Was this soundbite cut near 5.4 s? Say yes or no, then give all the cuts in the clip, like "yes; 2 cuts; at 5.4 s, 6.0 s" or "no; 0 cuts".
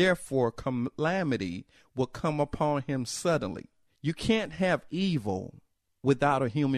no; 1 cut; at 3.9 s